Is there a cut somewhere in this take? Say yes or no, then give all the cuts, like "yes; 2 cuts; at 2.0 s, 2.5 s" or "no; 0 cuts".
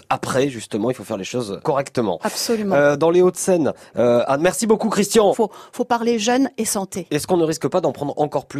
yes; 2 cuts; at 1.6 s, 5.3 s